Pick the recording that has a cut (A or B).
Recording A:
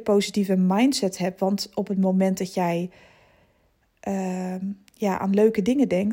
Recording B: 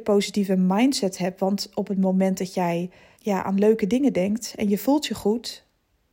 B